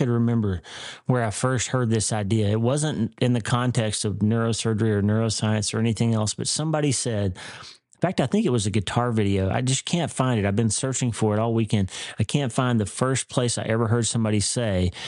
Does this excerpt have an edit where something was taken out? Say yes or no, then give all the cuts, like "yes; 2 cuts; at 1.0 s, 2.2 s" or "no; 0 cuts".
no; 0 cuts